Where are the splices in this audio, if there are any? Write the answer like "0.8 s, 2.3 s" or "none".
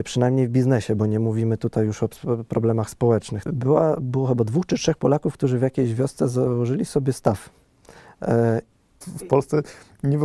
3.5 s, 8.9 s